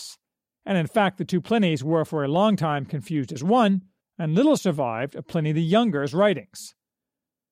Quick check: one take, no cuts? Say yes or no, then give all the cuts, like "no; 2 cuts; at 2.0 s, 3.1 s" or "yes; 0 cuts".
no; 1 cut; at 4.0 s